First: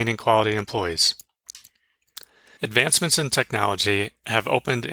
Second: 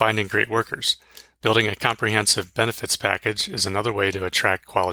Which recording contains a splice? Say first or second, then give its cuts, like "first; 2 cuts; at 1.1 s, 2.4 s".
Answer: first; 1 cut; at 2.6 s